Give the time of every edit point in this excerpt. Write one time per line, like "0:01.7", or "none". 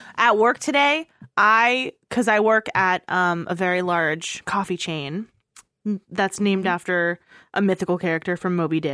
none